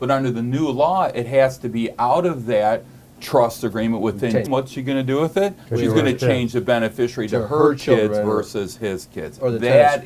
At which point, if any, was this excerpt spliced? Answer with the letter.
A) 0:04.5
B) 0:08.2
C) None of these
A